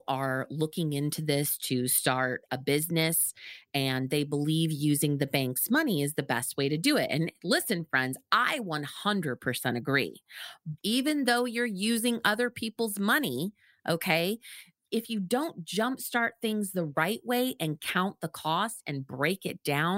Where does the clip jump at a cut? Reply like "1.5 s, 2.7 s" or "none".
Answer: 10.8 s